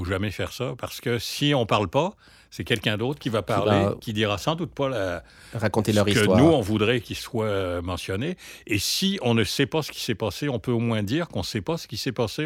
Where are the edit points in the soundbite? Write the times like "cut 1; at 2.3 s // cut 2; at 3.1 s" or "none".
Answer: none